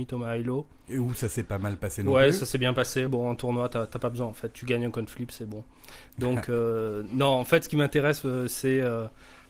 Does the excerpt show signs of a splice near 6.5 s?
no; 1 cut; at 3.1 s

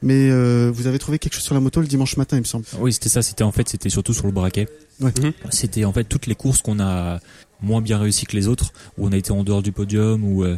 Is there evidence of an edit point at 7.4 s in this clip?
yes; 1 cut; at 7.4 s

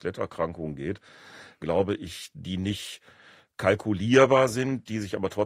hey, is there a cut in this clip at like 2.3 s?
yes; 1 cut; at 2.3 s

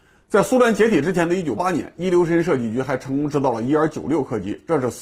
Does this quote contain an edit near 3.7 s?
no; 1 cut; at 1.6 s

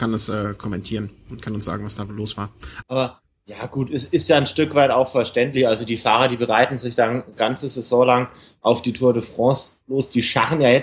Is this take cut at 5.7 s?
no; 1 cut; at 2.8 s

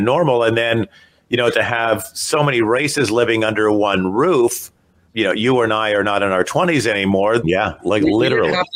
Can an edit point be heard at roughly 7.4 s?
yes; 2 cuts; at 5.0 s, 7.4 s

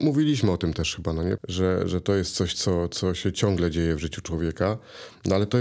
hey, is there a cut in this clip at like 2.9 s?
no; 1 cut; at 1.4 s

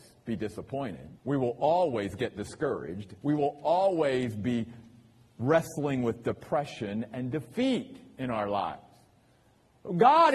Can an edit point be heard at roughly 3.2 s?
yes; 2 cuts; at 1.2 s, 3.2 s

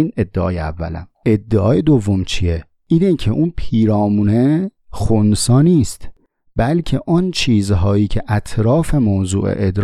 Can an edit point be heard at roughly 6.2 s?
no; 1 cut; at 1.2 s

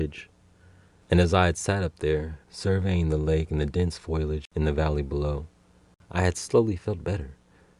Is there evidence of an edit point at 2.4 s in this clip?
yes; 2 cuts; at 1.0 s, 2.4 s

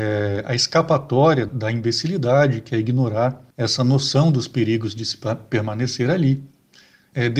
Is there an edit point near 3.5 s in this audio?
yes; 2 cuts; at 1.5 s, 3.5 s

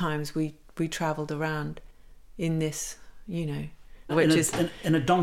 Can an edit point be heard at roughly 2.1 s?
no; 1 cut; at 4.1 s

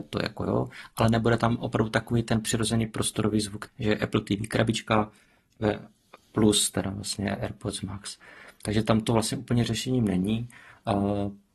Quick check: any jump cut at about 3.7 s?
yes; 1 cut; at 3.7 s

